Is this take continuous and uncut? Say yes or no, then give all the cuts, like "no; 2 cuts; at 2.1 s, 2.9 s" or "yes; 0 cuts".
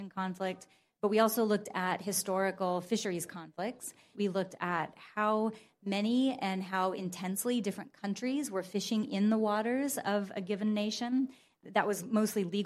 no; 1 cut; at 4.1 s